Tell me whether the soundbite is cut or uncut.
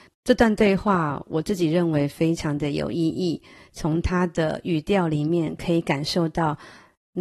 uncut